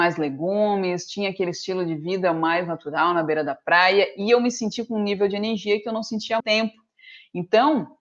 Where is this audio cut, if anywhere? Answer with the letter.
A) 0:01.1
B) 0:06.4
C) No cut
B